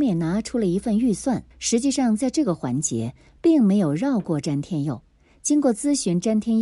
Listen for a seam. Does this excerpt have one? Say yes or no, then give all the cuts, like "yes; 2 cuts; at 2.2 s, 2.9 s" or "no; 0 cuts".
yes; 1 cut; at 1.5 s